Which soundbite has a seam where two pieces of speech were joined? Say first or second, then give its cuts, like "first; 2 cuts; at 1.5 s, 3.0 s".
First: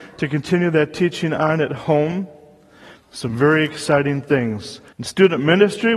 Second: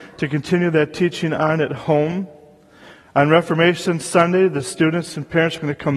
first; 2 cuts; at 2.9 s, 4.9 s